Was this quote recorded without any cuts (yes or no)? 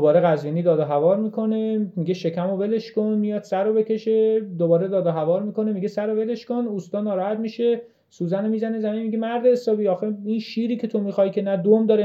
yes